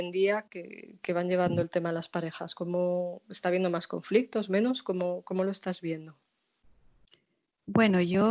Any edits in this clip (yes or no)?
no